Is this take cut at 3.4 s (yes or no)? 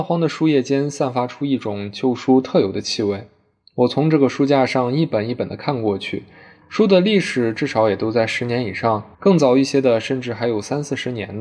no